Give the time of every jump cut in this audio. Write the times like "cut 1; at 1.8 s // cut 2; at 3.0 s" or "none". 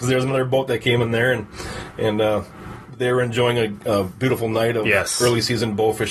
none